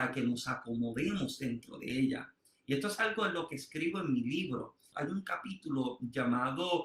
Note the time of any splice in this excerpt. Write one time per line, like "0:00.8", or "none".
0:04.9

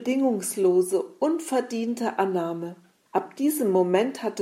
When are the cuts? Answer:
0:03.1

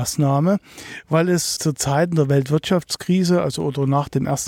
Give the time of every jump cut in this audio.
0:01.6

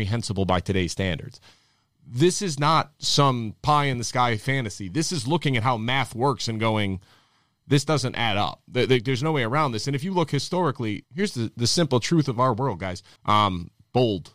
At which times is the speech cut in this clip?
0:11.0
0:13.2

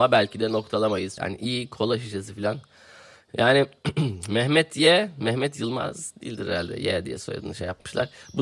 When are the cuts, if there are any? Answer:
0:01.2

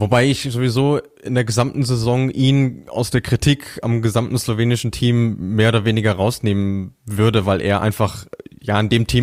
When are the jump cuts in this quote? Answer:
none

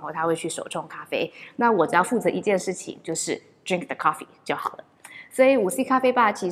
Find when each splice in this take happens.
none

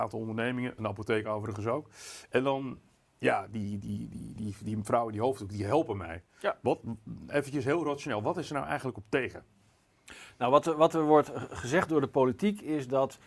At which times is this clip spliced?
0:04.4

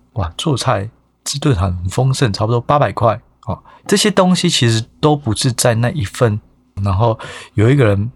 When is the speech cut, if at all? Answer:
0:03.8
0:06.8

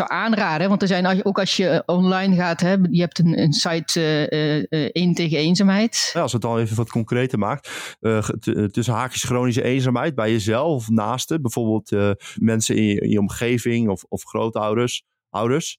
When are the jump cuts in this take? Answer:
0:06.1
0:12.4

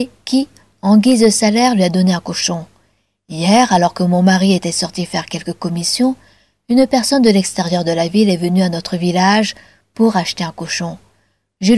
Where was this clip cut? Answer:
none

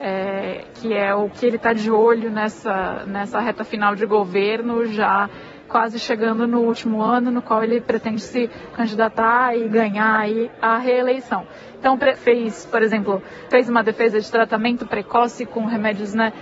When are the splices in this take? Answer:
0:12.2
0:13.5

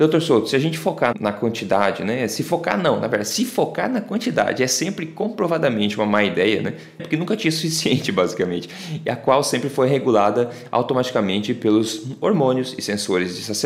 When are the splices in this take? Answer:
0:01.1
0:07.0

